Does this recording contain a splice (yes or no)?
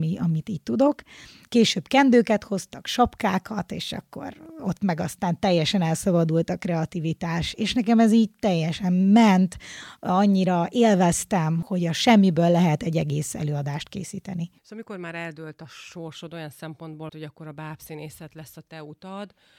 yes